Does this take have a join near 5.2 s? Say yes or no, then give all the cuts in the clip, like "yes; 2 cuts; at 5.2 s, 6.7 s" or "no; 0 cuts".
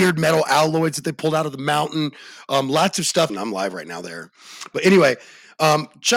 no; 1 cut; at 3.3 s